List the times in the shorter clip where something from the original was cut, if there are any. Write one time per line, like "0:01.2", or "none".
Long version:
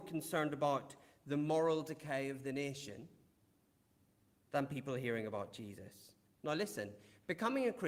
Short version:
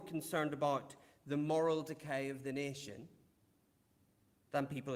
none